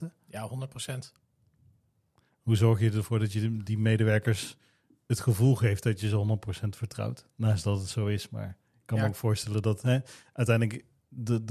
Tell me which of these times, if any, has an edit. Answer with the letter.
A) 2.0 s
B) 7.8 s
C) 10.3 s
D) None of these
D